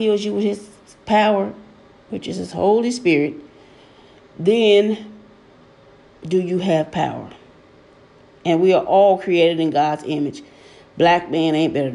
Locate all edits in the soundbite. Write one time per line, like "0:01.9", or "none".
none